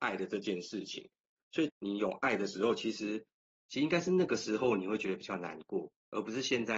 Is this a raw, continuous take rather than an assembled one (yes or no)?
no